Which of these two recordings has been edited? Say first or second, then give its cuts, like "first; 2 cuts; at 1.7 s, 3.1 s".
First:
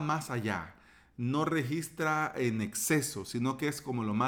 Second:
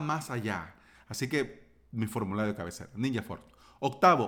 second; 1 cut; at 0.9 s